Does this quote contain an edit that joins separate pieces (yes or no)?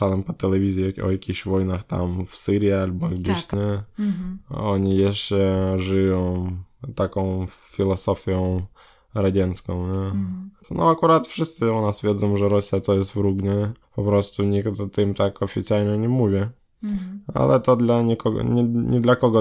yes